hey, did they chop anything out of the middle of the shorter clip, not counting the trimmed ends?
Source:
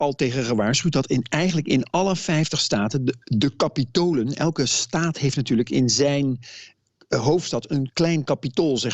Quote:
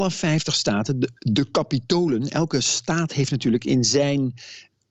no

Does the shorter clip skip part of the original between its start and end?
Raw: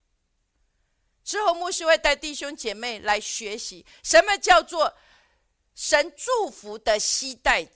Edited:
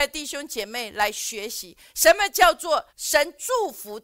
yes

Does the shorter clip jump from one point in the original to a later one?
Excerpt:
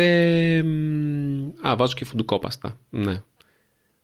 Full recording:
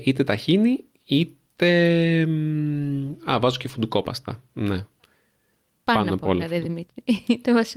no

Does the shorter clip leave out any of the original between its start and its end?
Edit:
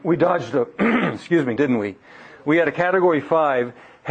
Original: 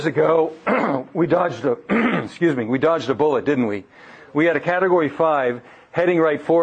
yes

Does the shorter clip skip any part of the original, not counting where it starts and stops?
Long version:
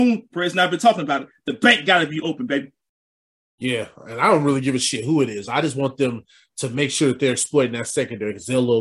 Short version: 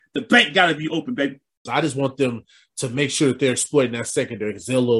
yes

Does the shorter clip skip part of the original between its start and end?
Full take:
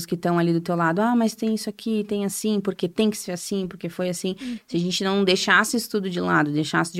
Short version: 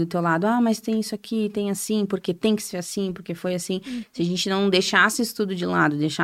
no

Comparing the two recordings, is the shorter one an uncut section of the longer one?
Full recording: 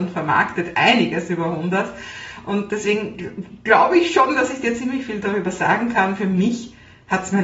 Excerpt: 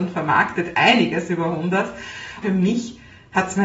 no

